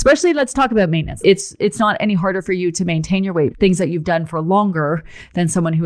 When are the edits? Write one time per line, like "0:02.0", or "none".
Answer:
0:01.2
0:03.5